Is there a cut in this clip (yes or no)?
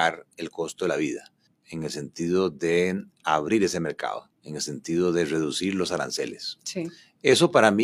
yes